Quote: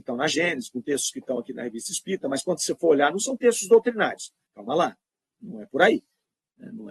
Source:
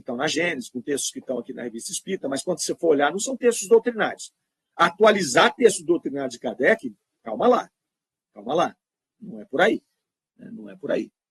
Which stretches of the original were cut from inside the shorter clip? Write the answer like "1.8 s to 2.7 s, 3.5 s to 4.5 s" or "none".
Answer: 4.5 s to 8.3 s

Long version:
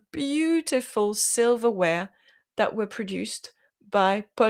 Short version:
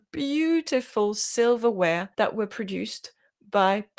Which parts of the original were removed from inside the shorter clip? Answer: 2.1 s to 2.5 s

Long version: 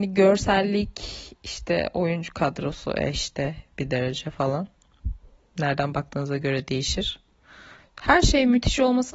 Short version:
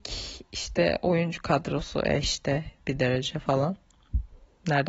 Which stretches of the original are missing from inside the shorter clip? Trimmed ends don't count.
none

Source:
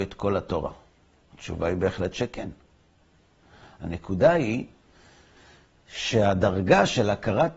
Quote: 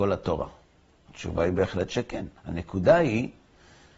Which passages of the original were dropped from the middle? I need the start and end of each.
2.6 s to 3.7 s

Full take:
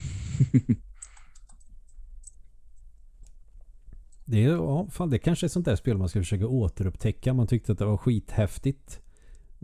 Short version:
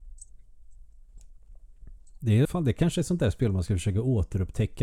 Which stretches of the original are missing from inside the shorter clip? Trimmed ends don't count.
4.5 s to 4.9 s

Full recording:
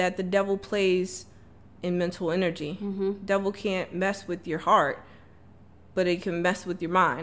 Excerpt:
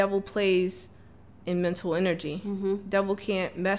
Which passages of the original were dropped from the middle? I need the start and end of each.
none

